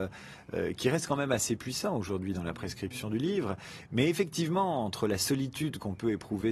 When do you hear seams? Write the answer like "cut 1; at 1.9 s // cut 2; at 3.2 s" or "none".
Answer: none